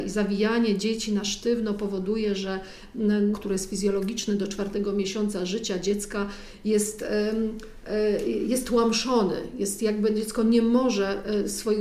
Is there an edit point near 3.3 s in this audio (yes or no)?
yes